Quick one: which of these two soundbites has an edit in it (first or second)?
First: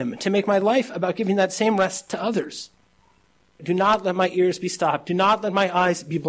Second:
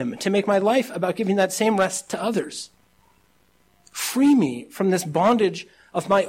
first